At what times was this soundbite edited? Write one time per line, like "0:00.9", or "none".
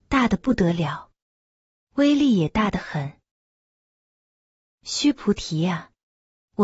none